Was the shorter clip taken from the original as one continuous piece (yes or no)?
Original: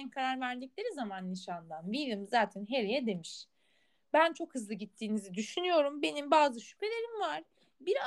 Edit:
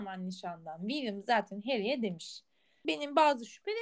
no